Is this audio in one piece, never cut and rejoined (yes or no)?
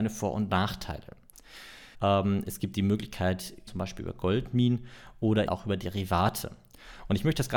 no